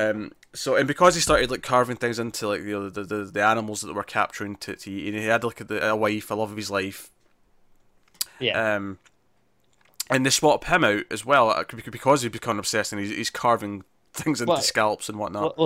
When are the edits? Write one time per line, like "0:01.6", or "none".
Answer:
0:08.3